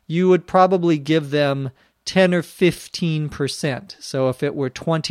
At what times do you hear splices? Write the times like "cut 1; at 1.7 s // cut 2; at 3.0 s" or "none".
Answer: none